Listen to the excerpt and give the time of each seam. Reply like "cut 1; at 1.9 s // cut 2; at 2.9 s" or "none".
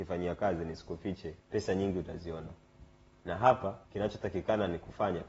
cut 1; at 1.4 s // cut 2; at 3.8 s